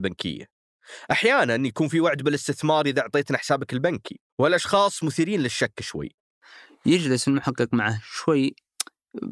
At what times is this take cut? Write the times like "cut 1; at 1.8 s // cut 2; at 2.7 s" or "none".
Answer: cut 1; at 4.3 s